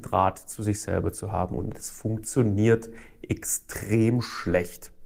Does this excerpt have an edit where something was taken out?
no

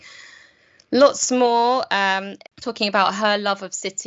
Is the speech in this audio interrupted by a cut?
yes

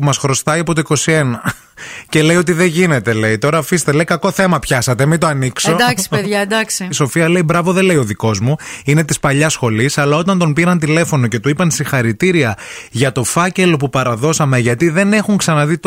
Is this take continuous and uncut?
yes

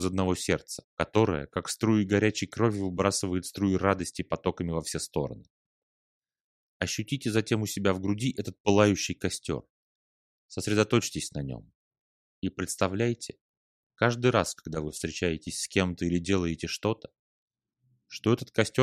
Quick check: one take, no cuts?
yes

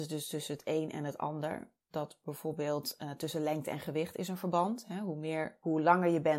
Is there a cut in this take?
no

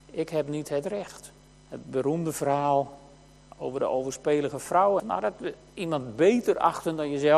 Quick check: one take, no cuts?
no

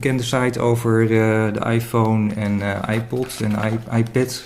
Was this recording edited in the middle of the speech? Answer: no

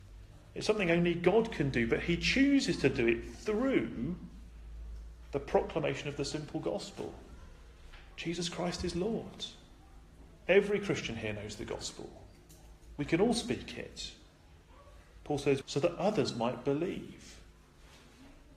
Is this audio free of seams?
no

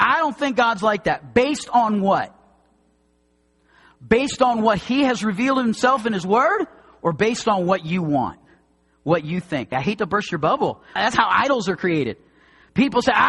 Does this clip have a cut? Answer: yes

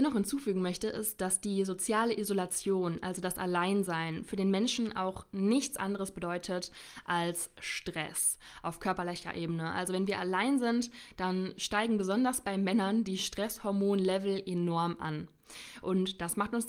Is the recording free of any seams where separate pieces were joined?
yes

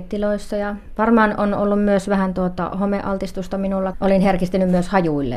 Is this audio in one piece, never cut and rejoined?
no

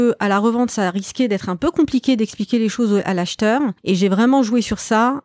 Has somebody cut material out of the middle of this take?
yes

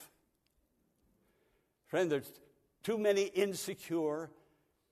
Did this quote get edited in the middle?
no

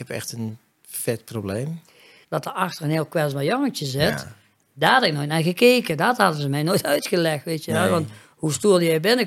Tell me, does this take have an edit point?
yes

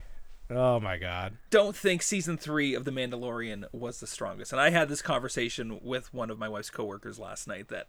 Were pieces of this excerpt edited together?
yes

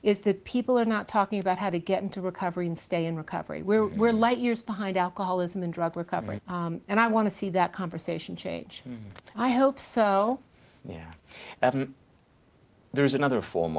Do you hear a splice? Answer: yes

